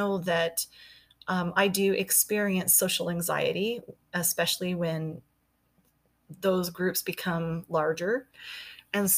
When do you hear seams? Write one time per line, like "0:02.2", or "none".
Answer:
none